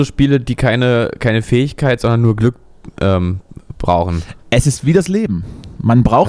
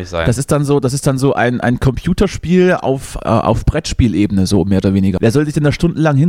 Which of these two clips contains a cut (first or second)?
second